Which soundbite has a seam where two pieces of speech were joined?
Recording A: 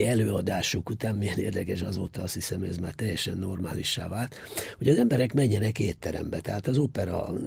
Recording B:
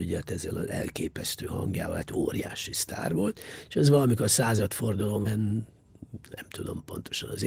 B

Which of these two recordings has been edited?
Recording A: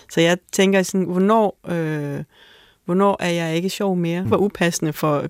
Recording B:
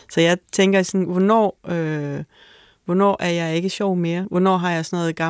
A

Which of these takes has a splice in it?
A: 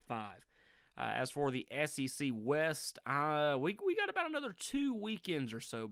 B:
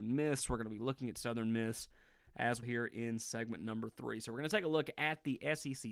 B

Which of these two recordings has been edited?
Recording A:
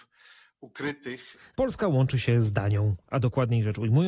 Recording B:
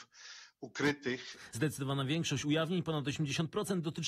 A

